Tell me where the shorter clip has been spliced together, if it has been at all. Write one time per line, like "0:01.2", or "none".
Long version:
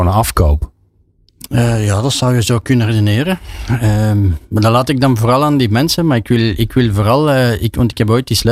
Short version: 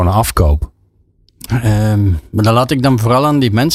0:01.5